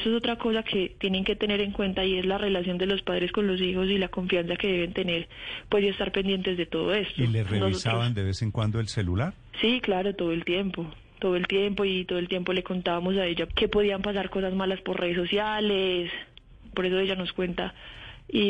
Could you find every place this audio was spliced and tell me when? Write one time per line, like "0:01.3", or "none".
0:13.5
0:16.7